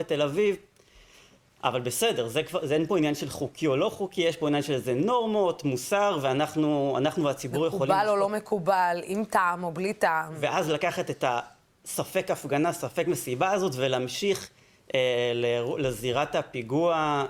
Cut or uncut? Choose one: uncut